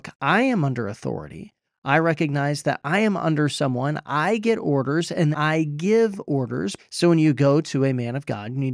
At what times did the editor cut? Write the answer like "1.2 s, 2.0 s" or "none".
5.3 s, 6.8 s